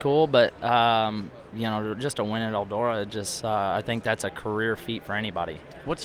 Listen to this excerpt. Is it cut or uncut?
uncut